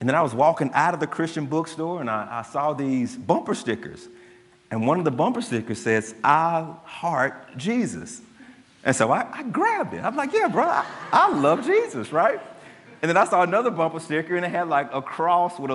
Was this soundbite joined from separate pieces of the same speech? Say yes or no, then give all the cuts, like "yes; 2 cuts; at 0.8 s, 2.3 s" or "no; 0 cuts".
no; 0 cuts